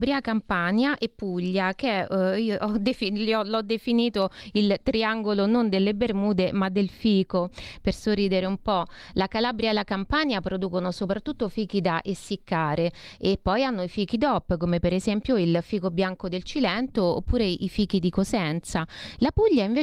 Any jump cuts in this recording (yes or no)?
no